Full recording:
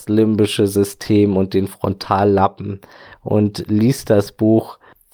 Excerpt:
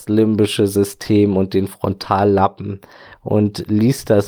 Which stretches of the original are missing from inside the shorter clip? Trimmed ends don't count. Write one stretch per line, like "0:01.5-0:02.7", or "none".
none